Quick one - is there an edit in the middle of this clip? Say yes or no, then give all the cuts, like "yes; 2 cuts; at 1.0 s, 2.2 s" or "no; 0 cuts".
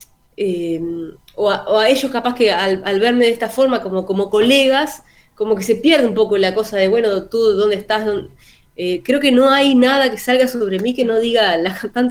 yes; 1 cut; at 8.6 s